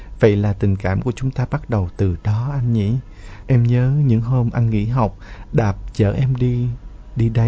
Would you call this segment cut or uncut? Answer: cut